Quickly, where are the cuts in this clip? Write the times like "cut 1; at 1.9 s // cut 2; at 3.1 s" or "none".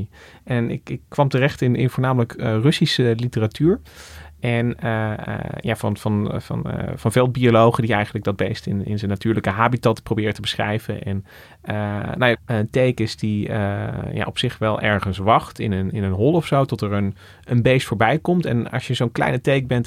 cut 1; at 12.4 s